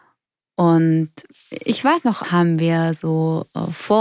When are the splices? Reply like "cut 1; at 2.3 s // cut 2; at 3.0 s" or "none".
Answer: cut 1; at 2.2 s